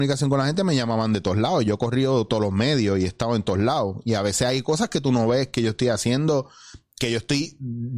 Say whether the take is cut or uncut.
uncut